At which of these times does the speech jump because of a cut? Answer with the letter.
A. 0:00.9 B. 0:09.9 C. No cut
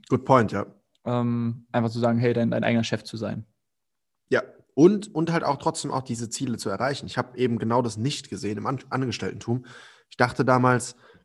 A